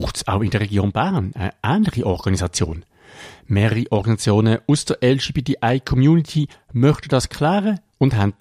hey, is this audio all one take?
yes; 0 cuts

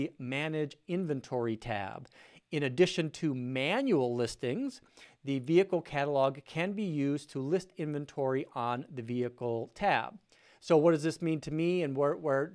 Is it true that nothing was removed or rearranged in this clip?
yes; 0 cuts

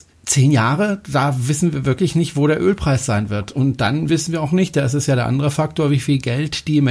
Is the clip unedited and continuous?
yes; 0 cuts

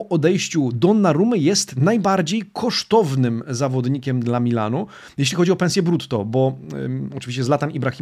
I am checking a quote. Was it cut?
no; 0 cuts

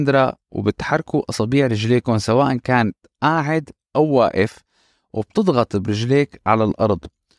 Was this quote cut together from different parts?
no; 0 cuts

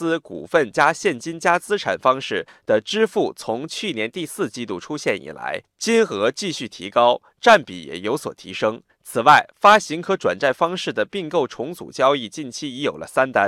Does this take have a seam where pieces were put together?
no; 0 cuts

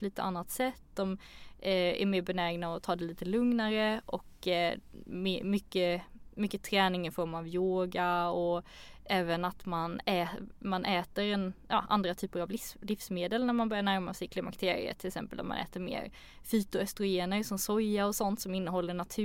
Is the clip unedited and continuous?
yes; 0 cuts

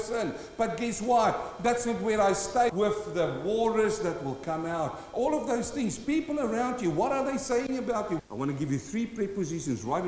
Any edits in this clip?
yes; 2 cuts; at 2.7 s, 8.2 s

